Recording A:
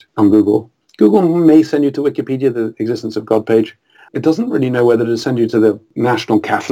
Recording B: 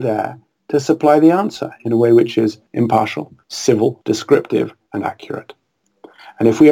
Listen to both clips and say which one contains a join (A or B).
A